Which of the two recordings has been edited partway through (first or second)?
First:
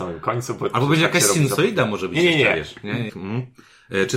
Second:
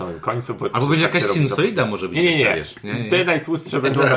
first